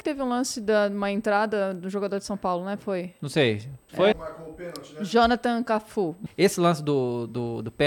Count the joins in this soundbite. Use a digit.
2